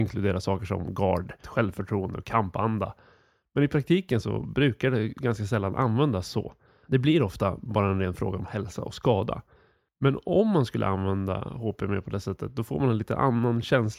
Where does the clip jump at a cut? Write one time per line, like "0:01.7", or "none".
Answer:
0:01.4

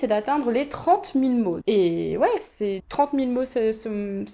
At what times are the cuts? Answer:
0:01.6
0:02.8

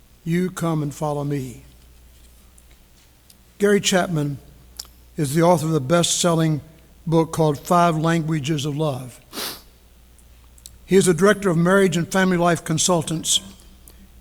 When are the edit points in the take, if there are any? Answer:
none

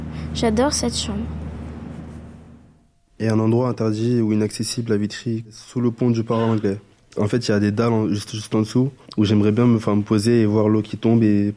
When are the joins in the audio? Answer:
none

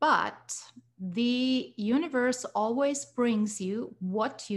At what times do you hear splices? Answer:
none

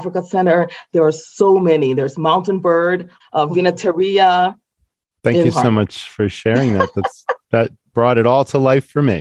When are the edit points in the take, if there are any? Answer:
0:03.2
0:05.2

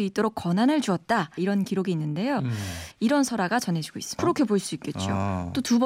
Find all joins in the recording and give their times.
0:01.4
0:02.9
0:04.2

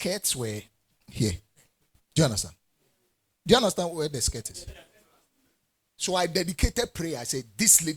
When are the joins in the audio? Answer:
none

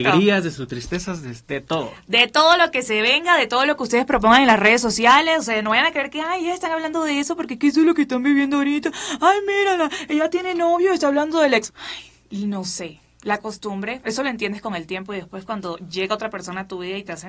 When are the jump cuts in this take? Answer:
0:11.7
0:14.0

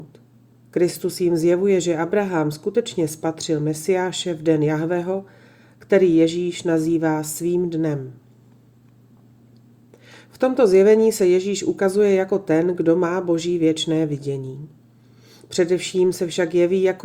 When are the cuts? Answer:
none

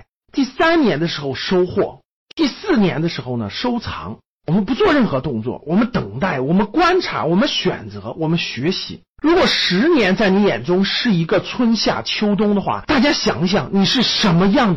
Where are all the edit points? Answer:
0:09.1

